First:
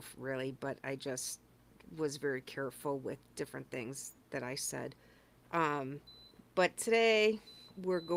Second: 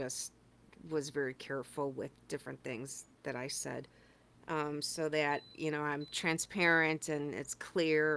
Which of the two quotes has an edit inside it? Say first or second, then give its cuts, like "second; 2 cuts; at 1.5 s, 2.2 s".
second; 1 cut; at 4.3 s